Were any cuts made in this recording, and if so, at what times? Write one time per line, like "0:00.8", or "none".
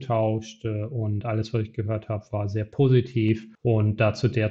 0:03.6

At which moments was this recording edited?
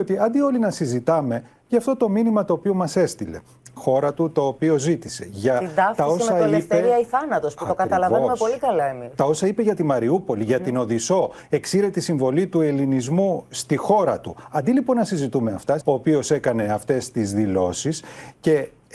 0:03.8
0:15.8

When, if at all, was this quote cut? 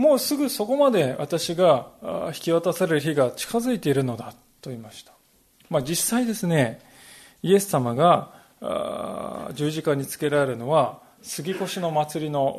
none

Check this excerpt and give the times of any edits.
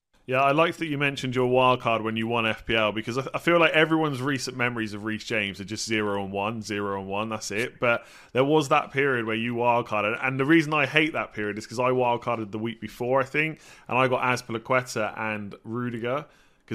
none

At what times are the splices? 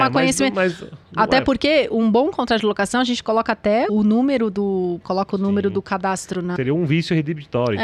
0:03.9
0:05.0
0:06.6

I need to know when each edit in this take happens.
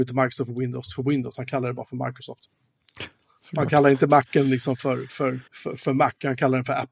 0:05.5

